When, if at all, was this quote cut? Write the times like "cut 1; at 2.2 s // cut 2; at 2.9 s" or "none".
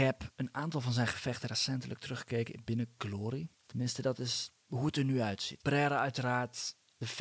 cut 1; at 3.5 s // cut 2; at 5.6 s